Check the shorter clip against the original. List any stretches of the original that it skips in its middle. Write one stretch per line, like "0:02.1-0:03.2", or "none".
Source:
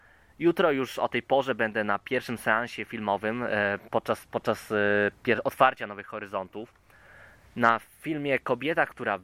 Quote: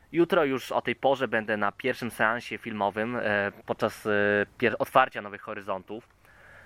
0:03.9-0:04.3